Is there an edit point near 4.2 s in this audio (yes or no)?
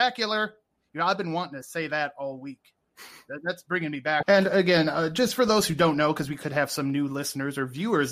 yes